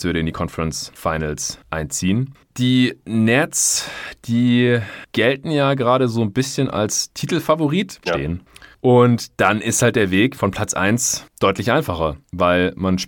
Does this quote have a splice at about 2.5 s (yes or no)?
no